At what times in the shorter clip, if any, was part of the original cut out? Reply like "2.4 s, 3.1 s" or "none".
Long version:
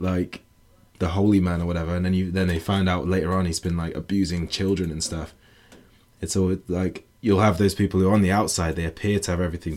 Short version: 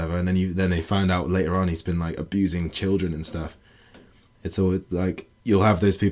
none